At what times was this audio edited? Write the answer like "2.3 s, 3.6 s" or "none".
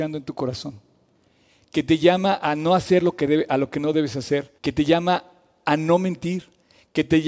4.6 s

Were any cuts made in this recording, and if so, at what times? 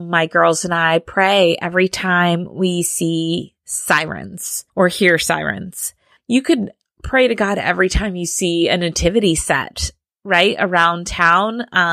4.7 s, 6.2 s

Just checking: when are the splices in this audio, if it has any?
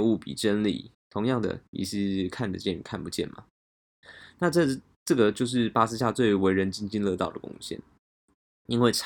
0.9 s

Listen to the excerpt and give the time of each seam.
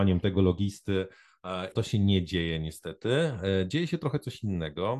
1.7 s

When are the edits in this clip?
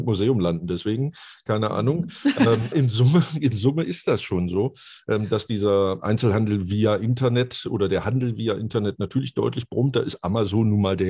2.7 s, 6.0 s

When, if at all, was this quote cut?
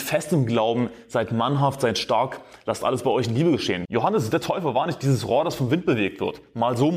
3.9 s

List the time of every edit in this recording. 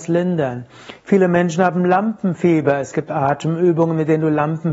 none

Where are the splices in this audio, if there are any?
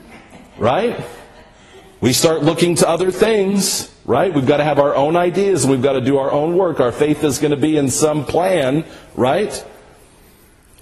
none

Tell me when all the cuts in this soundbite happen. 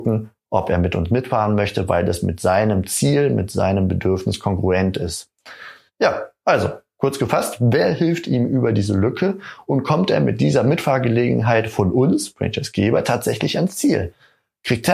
none

